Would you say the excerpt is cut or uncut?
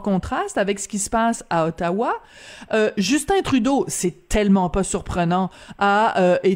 uncut